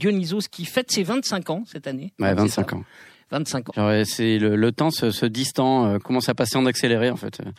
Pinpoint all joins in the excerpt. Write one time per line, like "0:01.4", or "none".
0:03.7
0:06.0